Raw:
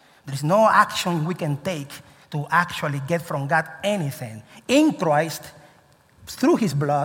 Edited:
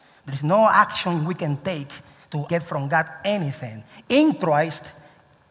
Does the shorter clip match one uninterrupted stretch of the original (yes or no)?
no